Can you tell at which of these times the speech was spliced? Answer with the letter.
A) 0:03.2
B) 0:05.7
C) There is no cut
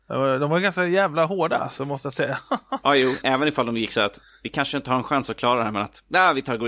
A